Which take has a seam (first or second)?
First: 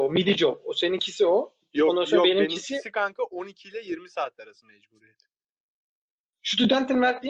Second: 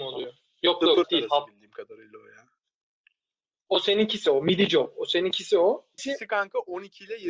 second